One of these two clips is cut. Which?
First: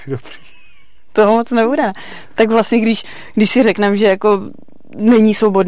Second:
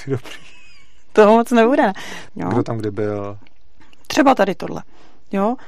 second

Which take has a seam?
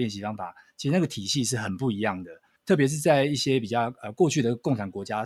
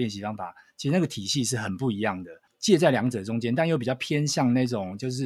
second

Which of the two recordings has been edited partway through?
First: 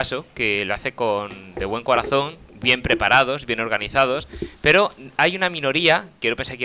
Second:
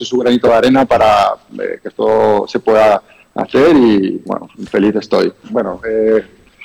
second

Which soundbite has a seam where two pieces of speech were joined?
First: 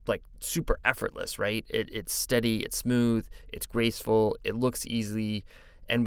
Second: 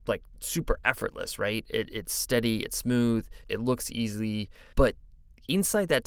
second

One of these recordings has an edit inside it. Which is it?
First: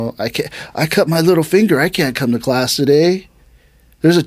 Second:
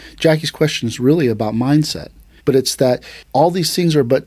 second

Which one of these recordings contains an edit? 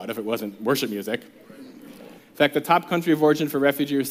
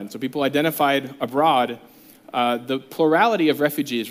first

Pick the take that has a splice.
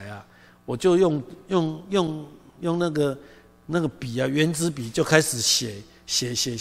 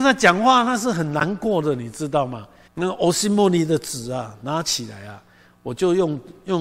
second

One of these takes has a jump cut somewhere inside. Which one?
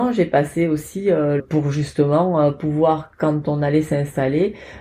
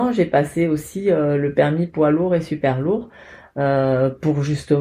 first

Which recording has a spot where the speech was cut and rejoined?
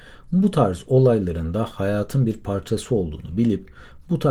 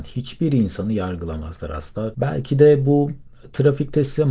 second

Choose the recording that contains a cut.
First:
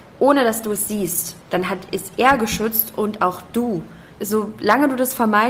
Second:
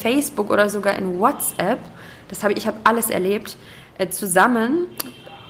first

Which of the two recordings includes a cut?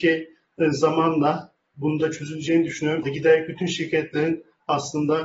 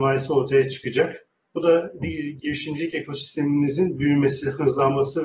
first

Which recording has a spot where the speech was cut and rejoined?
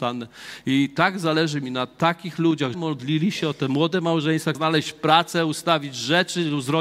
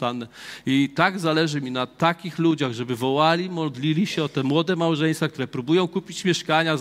first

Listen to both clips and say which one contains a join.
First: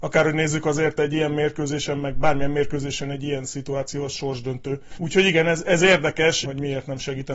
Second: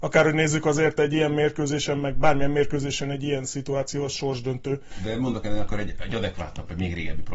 first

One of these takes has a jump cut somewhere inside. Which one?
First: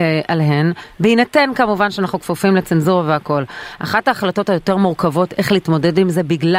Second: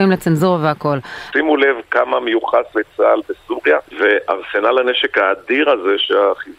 second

